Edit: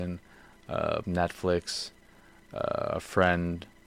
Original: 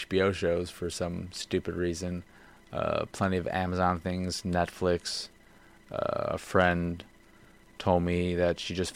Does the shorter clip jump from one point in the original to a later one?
yes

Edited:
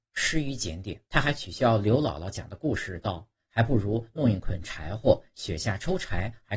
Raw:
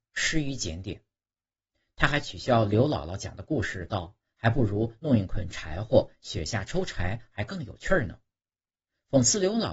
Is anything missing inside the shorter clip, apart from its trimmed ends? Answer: yes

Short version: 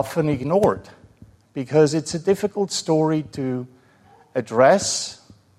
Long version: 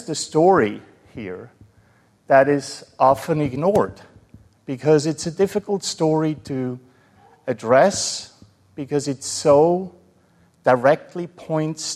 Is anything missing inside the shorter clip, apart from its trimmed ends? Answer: no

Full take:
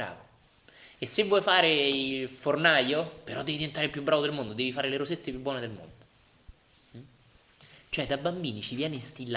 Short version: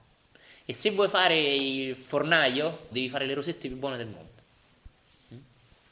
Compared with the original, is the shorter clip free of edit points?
no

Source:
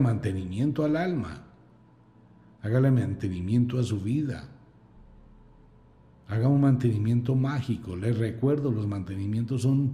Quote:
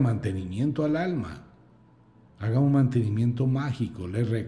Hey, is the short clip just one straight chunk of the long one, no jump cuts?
no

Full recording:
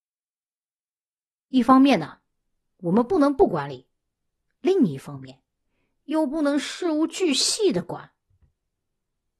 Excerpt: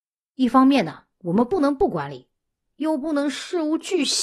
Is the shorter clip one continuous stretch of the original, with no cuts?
no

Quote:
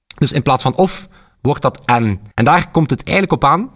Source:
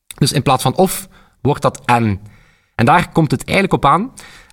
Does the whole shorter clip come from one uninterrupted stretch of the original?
no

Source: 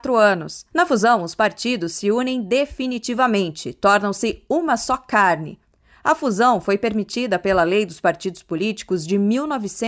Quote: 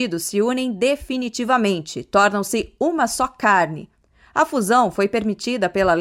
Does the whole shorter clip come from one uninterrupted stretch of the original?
yes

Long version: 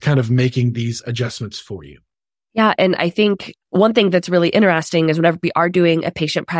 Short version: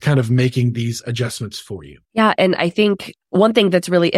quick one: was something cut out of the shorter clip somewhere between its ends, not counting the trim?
yes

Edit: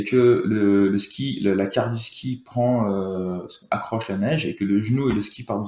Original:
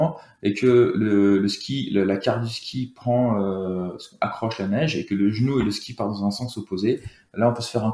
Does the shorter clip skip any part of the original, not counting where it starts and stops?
no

